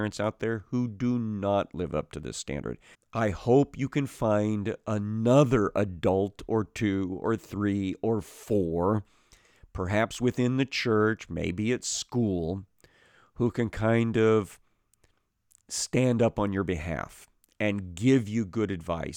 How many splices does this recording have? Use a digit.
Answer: 1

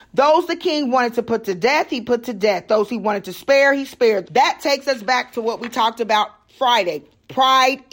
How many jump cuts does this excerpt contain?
1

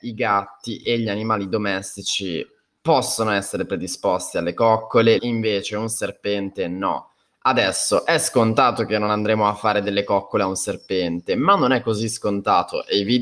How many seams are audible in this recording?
1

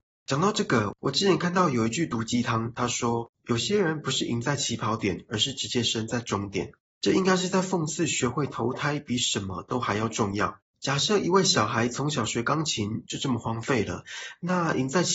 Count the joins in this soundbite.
2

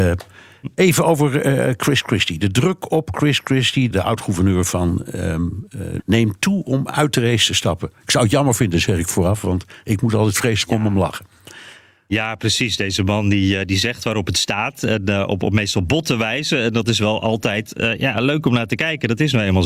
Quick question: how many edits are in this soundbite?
2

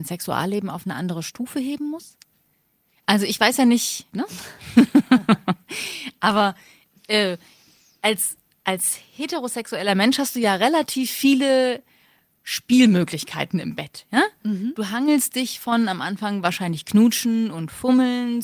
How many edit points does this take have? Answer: 1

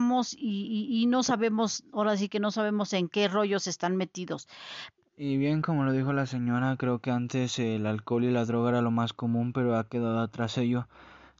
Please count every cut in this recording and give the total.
1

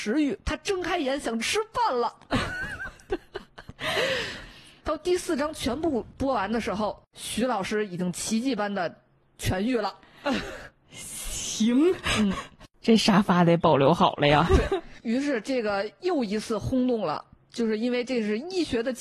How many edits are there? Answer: 0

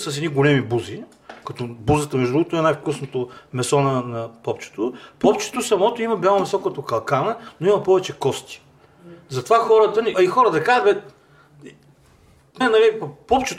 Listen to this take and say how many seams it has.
2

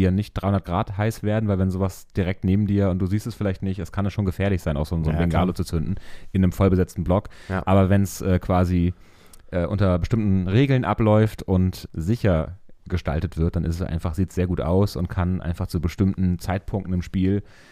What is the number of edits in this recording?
1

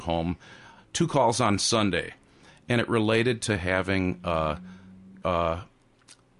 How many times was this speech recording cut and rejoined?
1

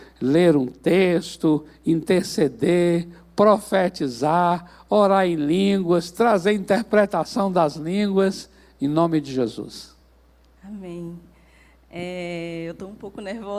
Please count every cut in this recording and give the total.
0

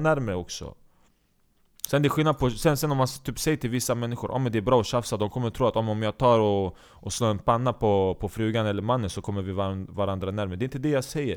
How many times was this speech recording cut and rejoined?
0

